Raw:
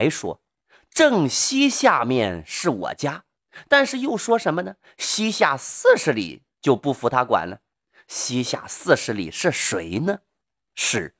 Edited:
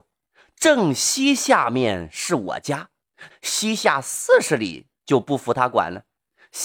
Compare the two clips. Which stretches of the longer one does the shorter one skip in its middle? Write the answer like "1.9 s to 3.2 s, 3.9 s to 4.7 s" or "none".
3.6 s to 4.9 s